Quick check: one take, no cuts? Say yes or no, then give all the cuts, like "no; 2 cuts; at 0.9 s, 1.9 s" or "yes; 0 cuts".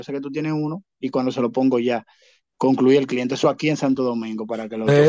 yes; 0 cuts